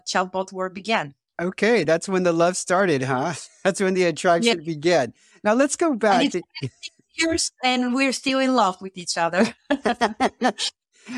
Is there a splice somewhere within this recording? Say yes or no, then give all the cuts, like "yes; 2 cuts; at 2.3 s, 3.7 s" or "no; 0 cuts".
no; 0 cuts